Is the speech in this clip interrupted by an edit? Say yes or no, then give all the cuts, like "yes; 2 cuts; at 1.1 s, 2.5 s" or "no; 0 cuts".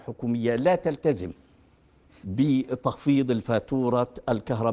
no; 0 cuts